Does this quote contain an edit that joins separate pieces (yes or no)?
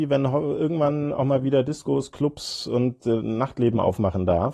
no